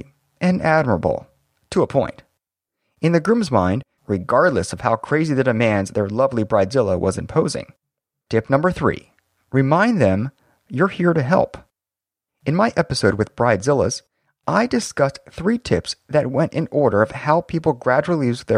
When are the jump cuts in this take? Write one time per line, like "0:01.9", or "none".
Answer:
0:04.0
0:08.3